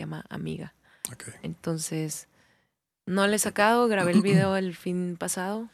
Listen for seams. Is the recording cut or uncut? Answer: uncut